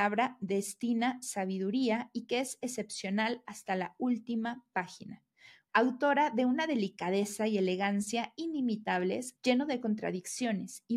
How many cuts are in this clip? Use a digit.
2